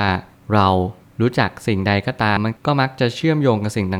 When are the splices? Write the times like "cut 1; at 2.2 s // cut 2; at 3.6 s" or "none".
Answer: cut 1; at 2.4 s